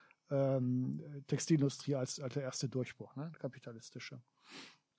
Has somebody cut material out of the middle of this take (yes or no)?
no